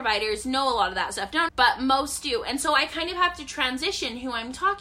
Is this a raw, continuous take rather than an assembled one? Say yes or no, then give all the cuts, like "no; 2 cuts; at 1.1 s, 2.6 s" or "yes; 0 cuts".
no; 1 cut; at 1.5 s